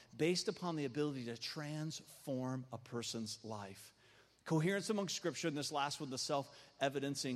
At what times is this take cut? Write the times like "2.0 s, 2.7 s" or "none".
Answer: none

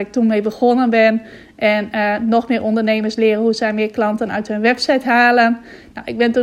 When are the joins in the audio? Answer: none

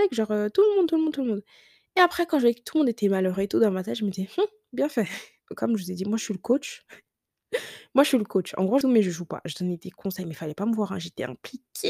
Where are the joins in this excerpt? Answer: 5.4 s, 8.8 s

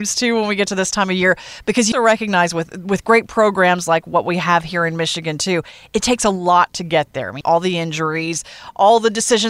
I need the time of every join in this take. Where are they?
1.9 s, 7.4 s

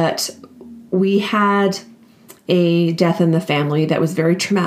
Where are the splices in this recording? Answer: none

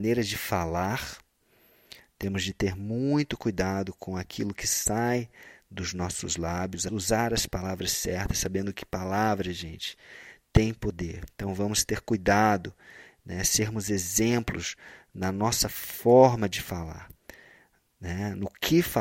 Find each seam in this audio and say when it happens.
6.9 s

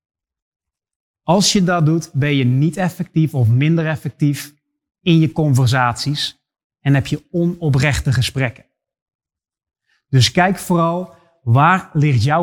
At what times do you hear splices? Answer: 1.1 s

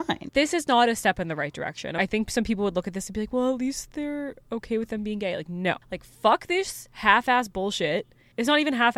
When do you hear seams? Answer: 5.8 s

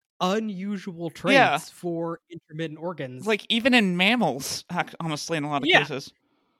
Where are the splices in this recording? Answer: none

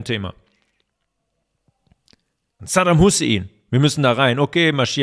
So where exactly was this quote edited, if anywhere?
2.6 s

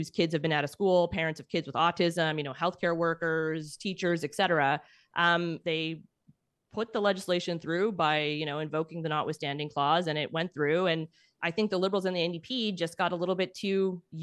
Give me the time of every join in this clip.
5.6 s

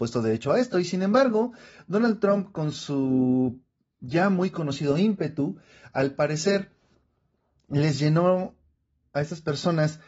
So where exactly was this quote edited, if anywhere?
none

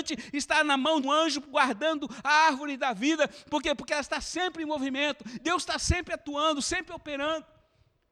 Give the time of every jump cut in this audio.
1.0 s, 5.4 s

